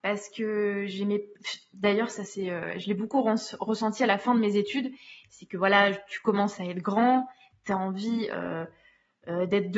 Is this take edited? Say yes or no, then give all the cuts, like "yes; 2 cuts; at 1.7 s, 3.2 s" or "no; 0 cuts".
no; 0 cuts